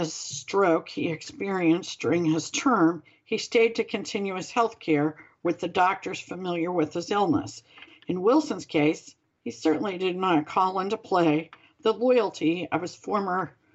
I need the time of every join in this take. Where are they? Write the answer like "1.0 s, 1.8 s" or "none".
7.9 s